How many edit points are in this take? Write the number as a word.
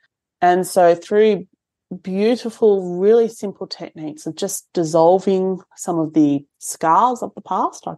one